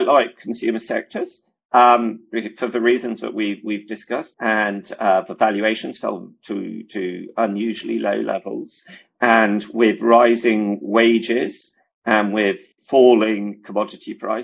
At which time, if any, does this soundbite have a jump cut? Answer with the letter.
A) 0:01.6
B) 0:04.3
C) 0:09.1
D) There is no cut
B